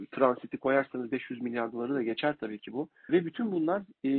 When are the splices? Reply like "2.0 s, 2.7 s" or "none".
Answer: 3.1 s